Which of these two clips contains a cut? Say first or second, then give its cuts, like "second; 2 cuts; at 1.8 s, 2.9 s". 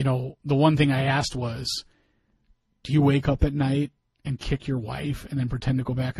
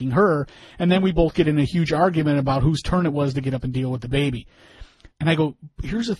second; 1 cut; at 5.1 s